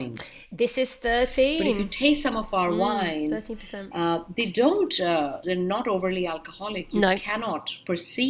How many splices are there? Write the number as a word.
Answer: one